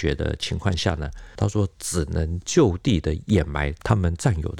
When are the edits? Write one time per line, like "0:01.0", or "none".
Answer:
0:01.4